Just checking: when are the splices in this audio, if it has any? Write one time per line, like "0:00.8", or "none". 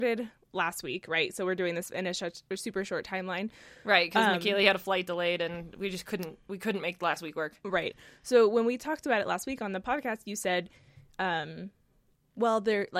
none